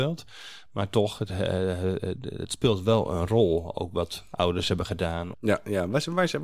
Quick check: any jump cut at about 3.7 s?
no; 1 cut; at 5.3 s

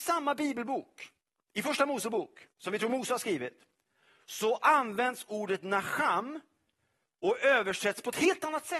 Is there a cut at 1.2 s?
no; 1 cut; at 2.5 s

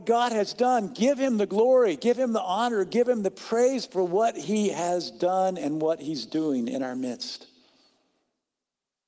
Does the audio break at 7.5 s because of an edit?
no; 0 cuts

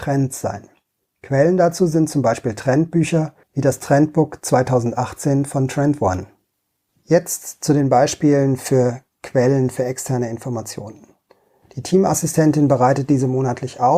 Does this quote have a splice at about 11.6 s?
yes; 3 cuts; at 3.4 s, 6.9 s, 11.6 s

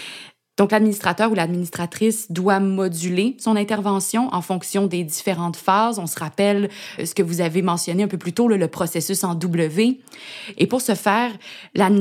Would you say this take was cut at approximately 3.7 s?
no; 2 cuts; at 7.0 s, 10.6 s

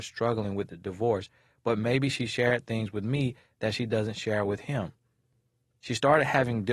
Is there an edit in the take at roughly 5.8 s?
yes; 1 cut; at 5.8 s

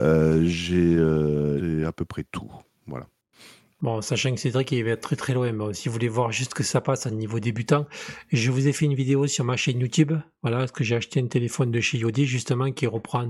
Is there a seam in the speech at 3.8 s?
no; 1 cut; at 1.6 s

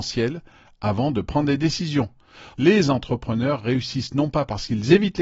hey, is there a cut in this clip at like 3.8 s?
no; 1 cut; at 2.5 s

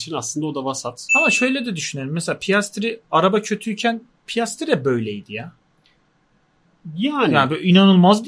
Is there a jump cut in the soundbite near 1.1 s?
yes; 1 cut; at 1.1 s

